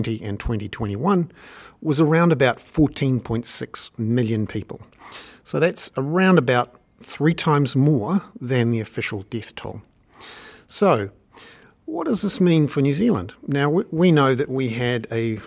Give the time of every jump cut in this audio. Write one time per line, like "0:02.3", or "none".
none